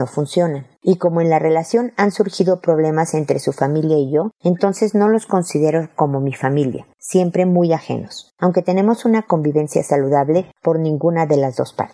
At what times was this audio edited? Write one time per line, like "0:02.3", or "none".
0:10.5